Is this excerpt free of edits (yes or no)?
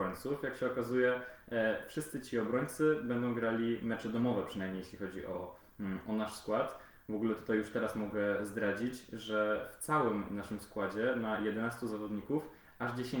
yes